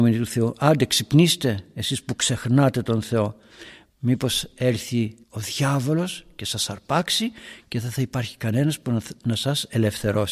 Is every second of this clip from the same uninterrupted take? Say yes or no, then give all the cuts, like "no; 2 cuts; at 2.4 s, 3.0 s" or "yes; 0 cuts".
no; 2 cuts; at 3.9 s, 5.2 s